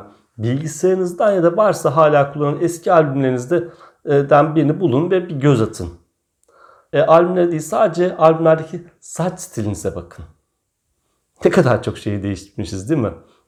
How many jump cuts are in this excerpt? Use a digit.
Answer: 1